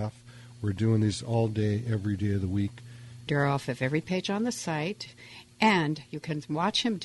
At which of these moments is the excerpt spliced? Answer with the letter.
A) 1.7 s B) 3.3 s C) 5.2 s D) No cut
B